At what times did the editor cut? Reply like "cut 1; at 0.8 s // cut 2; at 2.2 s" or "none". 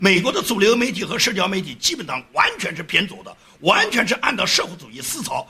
none